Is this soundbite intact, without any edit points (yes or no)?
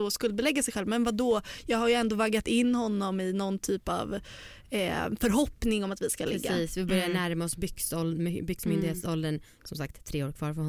yes